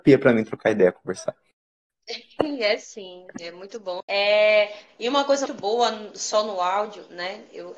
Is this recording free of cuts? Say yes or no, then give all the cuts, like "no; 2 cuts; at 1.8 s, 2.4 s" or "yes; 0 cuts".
no; 2 cuts; at 4.0 s, 5.5 s